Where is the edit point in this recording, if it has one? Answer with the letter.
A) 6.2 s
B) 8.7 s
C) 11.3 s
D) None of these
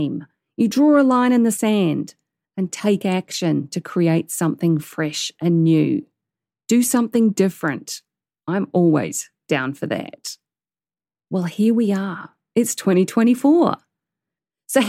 C